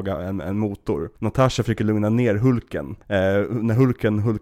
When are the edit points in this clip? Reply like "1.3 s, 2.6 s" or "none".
1.2 s, 3.0 s